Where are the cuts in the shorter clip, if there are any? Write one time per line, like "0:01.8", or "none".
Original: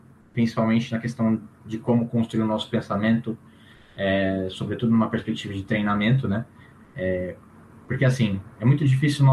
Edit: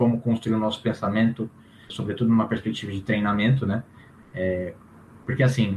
0:01.9